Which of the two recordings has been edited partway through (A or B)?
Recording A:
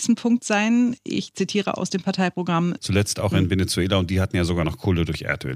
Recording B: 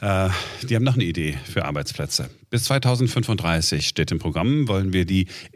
A